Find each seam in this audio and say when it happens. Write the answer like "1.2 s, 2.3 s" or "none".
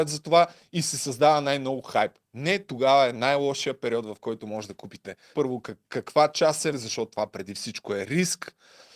5.3 s, 6.7 s